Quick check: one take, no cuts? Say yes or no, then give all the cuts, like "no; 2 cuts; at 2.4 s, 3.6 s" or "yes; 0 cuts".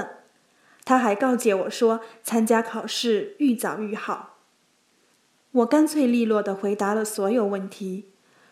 yes; 0 cuts